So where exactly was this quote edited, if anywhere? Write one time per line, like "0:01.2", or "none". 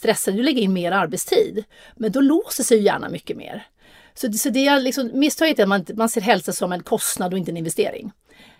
none